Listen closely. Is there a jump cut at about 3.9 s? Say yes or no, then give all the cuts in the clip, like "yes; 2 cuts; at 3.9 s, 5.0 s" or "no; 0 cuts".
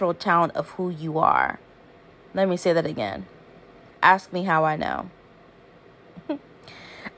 yes; 1 cut; at 3.9 s